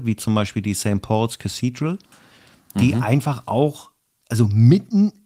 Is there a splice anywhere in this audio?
no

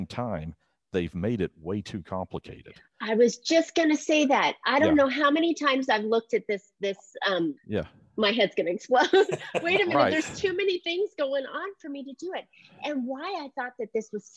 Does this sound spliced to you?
yes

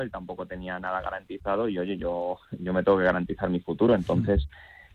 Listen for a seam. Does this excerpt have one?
no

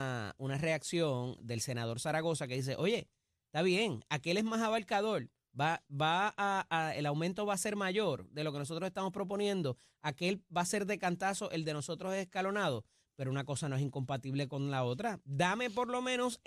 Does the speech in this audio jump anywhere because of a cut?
no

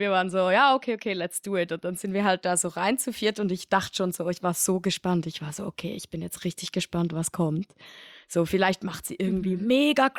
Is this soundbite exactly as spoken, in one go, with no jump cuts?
yes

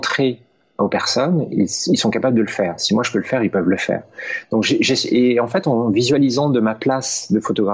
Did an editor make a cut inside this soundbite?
no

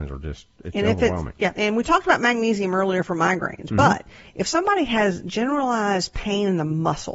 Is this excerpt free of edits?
yes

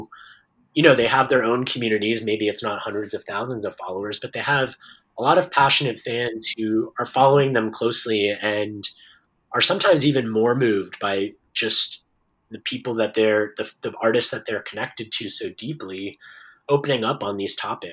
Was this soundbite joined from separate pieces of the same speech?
no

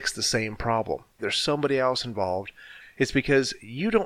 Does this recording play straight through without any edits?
no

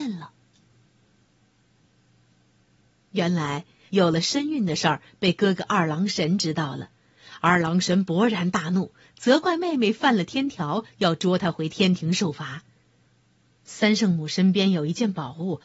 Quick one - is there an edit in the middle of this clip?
yes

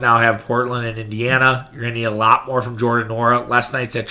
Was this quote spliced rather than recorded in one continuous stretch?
no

